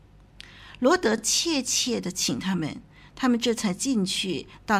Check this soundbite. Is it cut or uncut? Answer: uncut